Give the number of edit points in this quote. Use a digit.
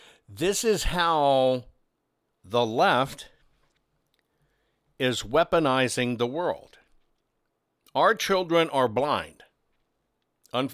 0